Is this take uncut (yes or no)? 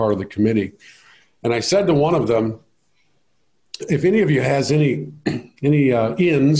yes